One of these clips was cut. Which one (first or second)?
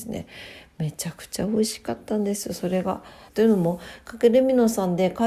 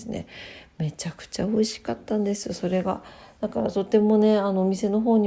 first